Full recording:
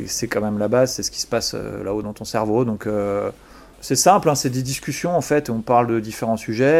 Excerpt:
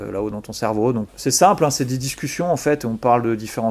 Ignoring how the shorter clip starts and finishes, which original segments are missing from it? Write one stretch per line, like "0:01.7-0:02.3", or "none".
0:02.8-0:03.7